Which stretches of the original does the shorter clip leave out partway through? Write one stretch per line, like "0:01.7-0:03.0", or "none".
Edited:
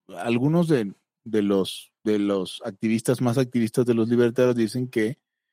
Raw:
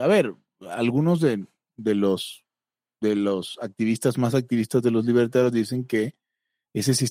0:02.5-0:02.9